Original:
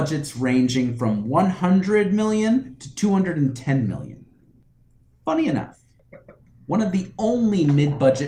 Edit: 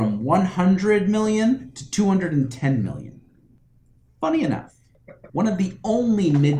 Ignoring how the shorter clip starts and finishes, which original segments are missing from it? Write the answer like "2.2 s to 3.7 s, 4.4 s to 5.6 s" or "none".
6.3 s to 6.6 s